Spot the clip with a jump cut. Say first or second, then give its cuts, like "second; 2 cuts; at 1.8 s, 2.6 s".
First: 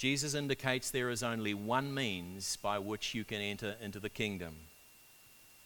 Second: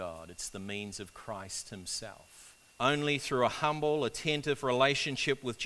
second; 1 cut; at 2.7 s